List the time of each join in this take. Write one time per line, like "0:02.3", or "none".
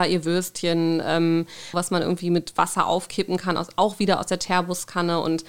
0:01.7